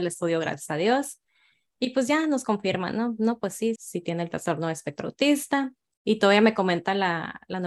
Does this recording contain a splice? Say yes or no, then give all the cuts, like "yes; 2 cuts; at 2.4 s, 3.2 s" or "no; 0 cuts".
yes; 2 cuts; at 3.8 s, 6.0 s